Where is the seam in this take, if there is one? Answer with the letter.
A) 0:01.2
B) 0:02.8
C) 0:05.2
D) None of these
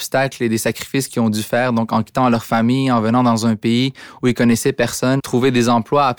C